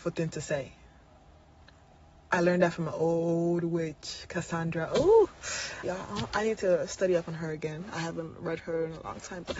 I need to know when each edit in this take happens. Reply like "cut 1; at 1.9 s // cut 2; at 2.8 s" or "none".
cut 1; at 5.8 s